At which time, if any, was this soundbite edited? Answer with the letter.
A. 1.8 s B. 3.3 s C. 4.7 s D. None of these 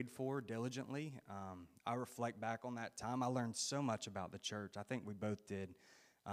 D